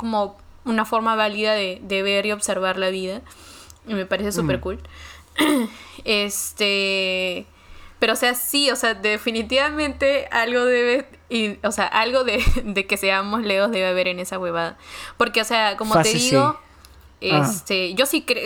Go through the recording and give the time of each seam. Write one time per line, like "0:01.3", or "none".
0:17.1